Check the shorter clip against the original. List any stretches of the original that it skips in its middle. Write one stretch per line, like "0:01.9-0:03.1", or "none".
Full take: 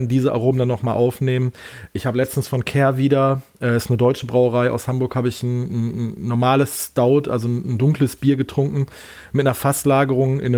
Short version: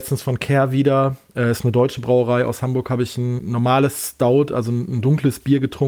0:05.6-0:06.2